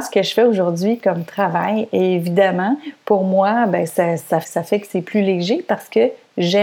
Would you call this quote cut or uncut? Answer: cut